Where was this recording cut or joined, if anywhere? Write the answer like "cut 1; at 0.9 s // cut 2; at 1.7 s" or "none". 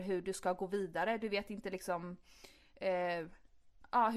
none